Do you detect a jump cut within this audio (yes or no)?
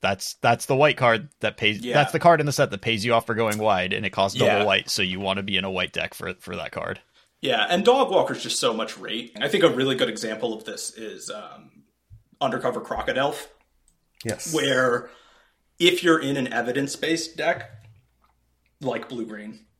yes